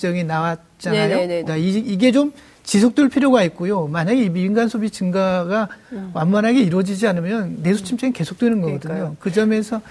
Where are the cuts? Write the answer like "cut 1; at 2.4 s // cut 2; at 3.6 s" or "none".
cut 1; at 1.5 s

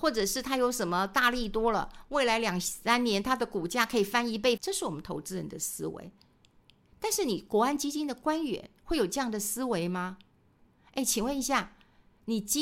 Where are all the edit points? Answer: cut 1; at 4.6 s

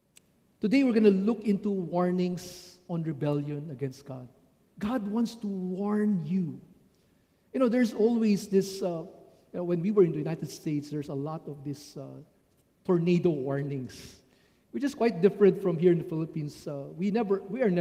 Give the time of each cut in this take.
none

